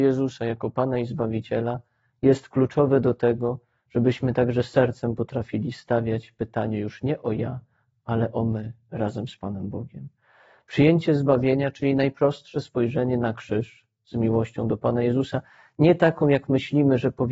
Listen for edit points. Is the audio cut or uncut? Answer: uncut